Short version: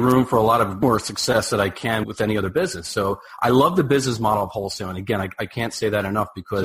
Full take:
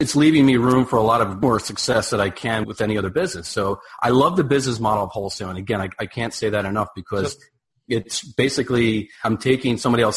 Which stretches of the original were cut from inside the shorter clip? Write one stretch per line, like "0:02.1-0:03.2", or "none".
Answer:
none